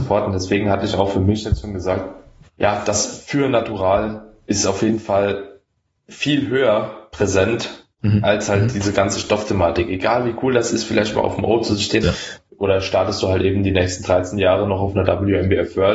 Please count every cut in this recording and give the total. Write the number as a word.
one